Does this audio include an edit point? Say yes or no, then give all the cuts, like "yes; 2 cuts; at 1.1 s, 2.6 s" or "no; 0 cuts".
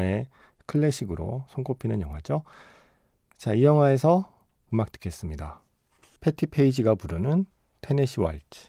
no; 0 cuts